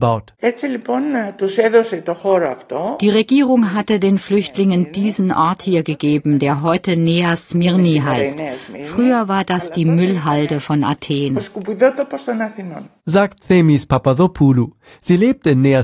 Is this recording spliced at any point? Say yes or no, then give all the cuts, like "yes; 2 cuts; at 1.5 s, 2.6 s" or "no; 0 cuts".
no; 0 cuts